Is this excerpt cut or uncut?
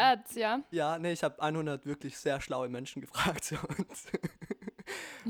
uncut